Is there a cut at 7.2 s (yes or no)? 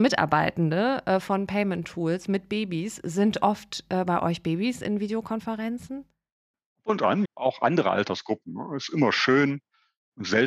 yes